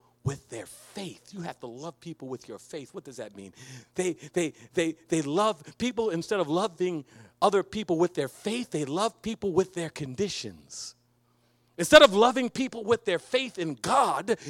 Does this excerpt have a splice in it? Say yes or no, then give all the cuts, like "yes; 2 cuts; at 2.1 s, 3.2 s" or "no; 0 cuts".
no; 0 cuts